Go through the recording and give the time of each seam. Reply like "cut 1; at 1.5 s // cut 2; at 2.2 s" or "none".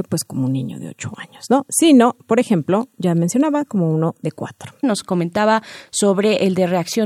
cut 1; at 4.8 s